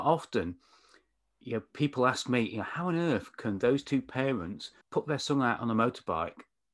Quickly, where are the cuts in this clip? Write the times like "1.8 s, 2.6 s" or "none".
4.8 s